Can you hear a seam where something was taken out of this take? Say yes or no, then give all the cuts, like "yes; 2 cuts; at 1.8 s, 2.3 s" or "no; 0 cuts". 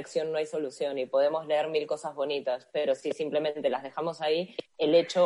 no; 0 cuts